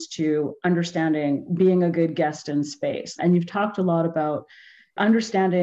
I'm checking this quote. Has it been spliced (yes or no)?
yes